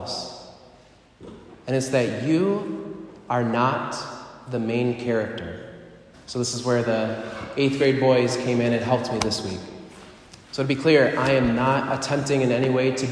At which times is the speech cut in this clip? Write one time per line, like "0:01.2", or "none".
0:06.1
0:10.4